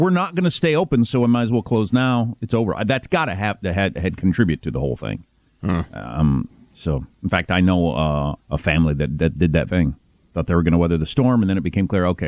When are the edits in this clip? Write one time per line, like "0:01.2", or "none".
0:08.4
0:09.7